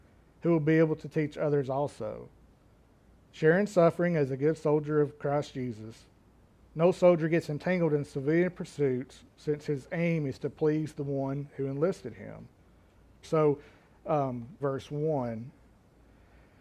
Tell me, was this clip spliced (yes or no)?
yes